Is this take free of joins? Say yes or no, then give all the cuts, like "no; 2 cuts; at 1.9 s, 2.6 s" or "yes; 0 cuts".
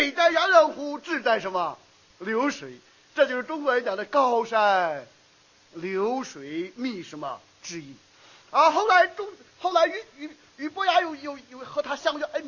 yes; 0 cuts